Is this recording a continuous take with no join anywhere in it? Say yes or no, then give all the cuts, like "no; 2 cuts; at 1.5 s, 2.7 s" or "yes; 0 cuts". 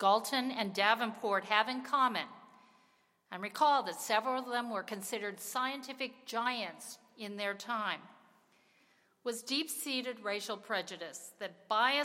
yes; 0 cuts